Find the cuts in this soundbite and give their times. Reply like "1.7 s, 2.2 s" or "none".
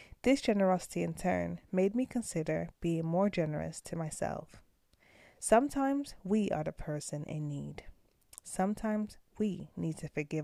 none